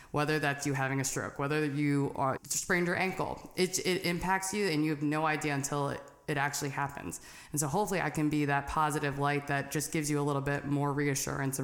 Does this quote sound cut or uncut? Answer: cut